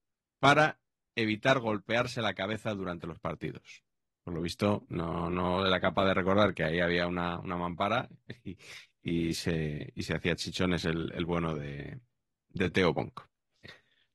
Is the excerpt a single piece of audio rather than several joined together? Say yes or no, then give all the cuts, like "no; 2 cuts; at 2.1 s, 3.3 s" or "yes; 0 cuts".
yes; 0 cuts